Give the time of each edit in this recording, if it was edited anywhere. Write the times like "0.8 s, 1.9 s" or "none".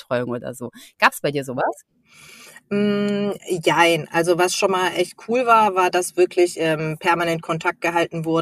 none